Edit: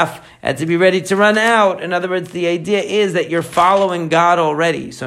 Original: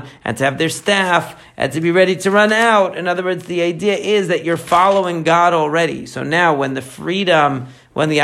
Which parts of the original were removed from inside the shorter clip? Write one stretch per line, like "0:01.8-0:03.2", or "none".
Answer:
none